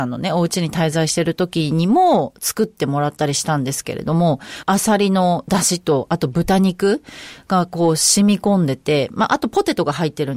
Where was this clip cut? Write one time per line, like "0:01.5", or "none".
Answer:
none